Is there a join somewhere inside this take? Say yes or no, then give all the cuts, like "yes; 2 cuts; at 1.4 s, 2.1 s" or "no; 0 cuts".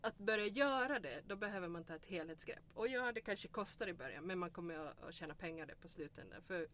no; 0 cuts